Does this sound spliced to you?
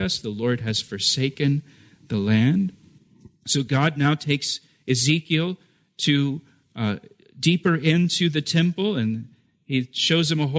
no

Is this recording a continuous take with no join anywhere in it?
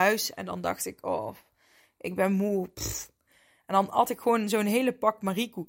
yes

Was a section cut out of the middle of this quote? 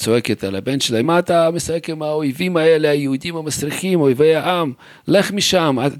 yes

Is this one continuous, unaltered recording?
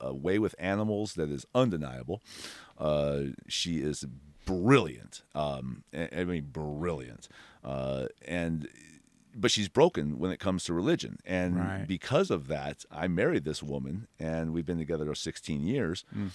yes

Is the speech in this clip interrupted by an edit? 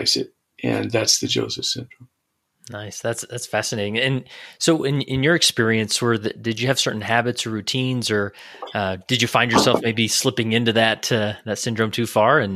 no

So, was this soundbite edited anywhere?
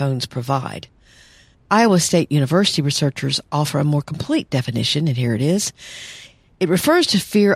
yes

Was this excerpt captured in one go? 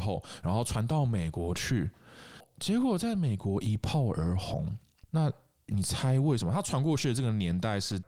yes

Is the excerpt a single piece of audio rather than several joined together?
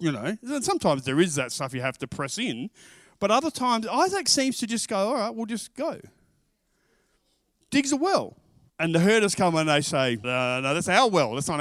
no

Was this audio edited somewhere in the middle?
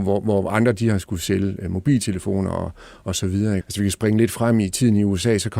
yes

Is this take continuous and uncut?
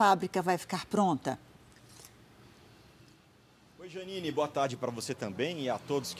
yes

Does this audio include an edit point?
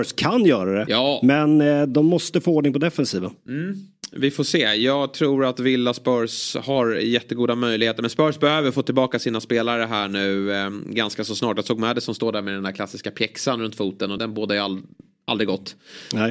yes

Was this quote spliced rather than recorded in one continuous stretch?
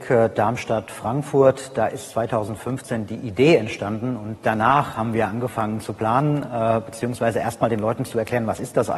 no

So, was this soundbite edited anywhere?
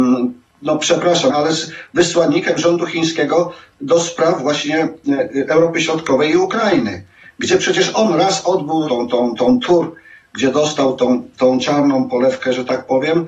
yes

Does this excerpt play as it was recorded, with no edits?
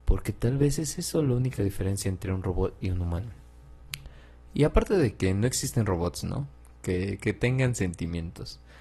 yes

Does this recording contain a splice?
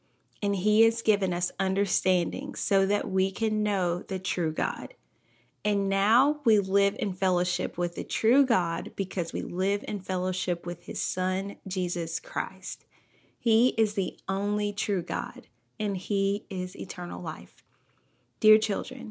no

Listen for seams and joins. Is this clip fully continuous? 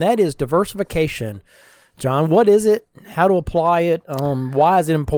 yes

